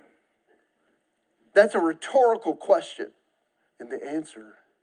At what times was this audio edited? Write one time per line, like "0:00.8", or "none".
0:03.7